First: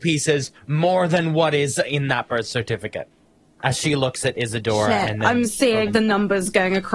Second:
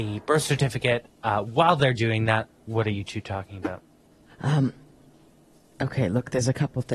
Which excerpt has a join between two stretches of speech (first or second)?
first